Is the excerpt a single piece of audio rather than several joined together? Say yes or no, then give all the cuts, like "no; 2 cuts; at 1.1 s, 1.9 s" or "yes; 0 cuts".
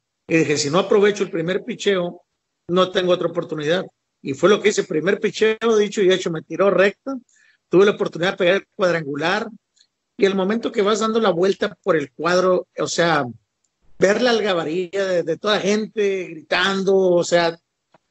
yes; 0 cuts